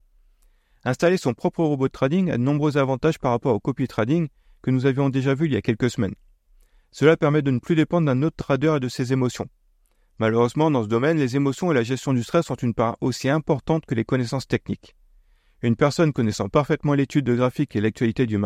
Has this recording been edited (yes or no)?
no